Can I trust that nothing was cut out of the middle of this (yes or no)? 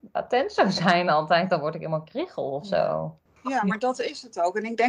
yes